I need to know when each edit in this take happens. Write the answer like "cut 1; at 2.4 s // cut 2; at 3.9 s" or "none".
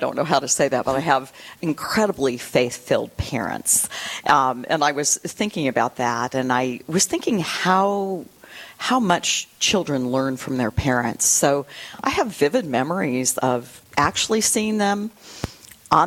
cut 1; at 13.9 s